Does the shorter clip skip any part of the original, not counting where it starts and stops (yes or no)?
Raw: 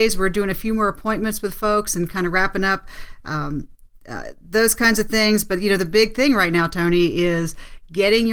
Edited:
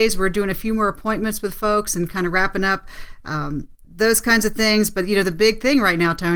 yes